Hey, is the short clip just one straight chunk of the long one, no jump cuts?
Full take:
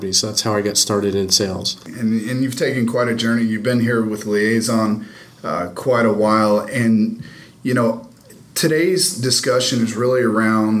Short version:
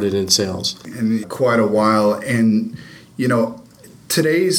no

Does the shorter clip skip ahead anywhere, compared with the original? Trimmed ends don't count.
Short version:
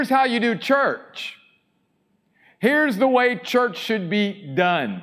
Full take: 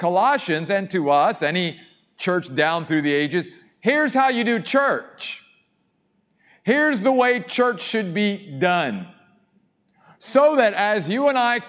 no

